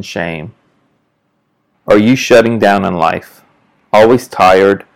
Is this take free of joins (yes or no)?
no